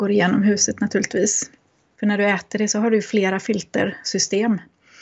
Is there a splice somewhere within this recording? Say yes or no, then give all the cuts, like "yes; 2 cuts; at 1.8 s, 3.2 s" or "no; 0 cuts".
yes; 1 cut; at 2.0 s